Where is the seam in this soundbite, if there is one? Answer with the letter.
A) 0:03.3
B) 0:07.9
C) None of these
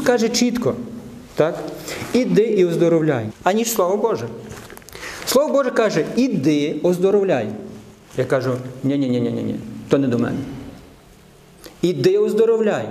A